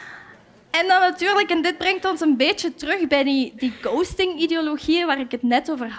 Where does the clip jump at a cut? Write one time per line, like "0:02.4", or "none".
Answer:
none